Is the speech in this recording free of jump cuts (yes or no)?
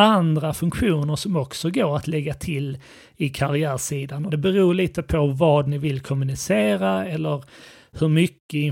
no